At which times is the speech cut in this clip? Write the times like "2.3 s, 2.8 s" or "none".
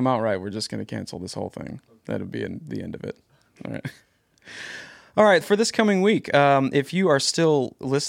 5.4 s